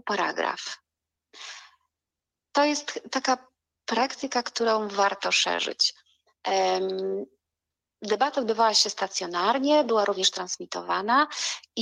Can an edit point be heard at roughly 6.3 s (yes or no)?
no